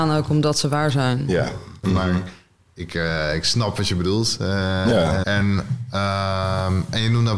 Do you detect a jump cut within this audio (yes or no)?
yes